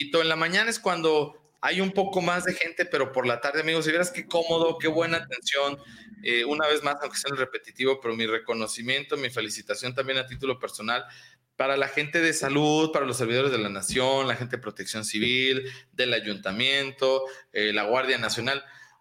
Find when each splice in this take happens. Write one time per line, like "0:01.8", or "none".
none